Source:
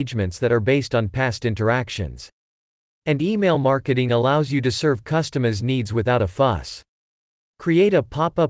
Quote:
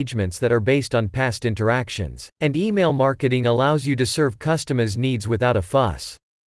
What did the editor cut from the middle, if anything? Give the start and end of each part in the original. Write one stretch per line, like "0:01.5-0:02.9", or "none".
0:02.3-0:03.0